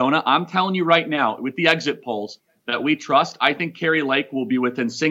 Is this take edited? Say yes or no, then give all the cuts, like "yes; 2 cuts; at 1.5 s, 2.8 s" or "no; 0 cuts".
no; 0 cuts